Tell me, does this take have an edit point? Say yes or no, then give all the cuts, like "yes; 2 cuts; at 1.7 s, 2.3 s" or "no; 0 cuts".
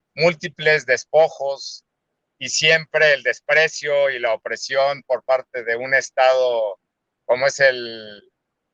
yes; 1 cut; at 2.4 s